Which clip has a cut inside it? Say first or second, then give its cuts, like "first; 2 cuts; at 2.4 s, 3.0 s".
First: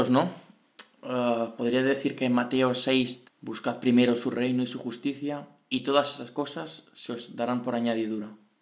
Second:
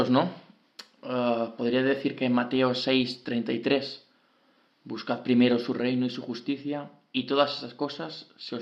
first; 1 cut; at 3.2 s